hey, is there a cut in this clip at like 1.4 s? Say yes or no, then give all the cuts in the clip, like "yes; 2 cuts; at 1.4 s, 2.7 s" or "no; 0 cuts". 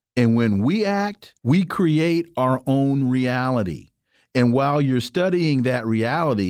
yes; 1 cut; at 1.4 s